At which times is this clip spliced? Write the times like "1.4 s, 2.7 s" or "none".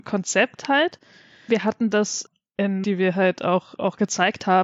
1.5 s, 2.8 s